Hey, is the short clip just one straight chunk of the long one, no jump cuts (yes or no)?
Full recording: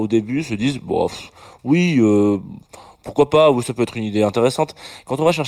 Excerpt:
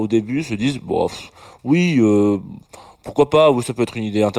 yes